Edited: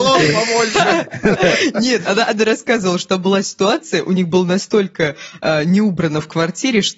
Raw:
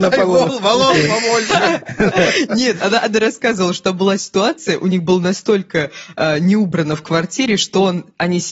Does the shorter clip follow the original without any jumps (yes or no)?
yes